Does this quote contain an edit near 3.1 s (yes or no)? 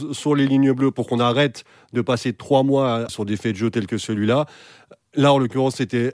yes